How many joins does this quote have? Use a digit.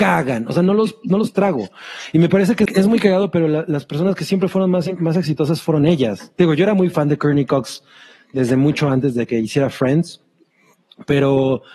1